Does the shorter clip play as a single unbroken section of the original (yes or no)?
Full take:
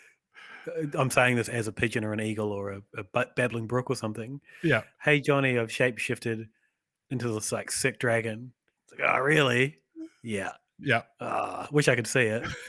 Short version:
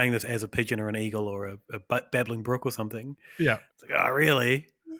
no